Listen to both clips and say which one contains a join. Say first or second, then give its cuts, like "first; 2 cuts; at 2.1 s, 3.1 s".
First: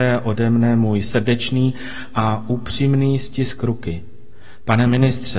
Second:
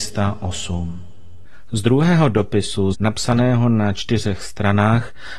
second; 1 cut; at 2.9 s